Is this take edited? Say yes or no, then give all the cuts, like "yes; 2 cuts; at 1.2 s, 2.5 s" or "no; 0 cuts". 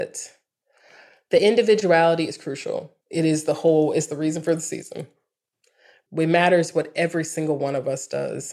yes; 2 cuts; at 3.0 s, 6.1 s